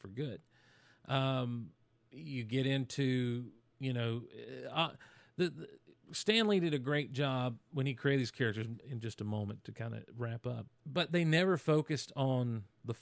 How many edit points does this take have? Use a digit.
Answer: 2